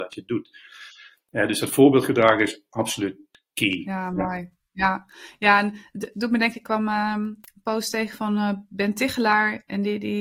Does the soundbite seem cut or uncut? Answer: uncut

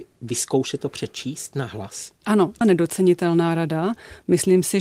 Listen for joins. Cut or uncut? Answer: cut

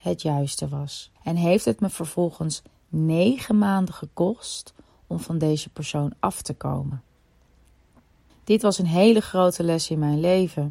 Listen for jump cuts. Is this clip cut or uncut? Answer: cut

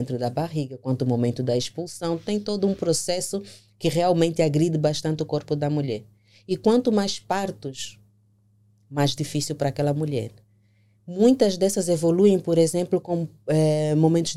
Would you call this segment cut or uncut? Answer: uncut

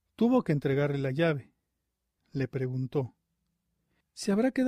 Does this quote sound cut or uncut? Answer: cut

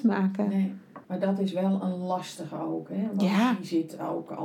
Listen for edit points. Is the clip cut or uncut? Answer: cut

